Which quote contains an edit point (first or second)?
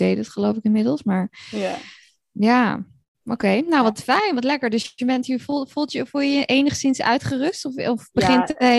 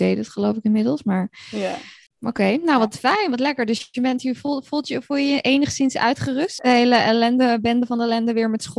second